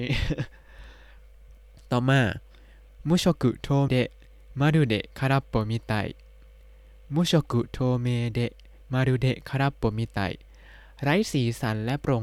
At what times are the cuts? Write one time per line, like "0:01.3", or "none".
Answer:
0:03.9